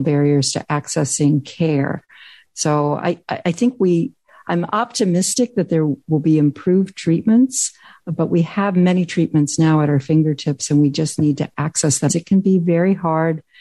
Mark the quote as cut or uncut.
cut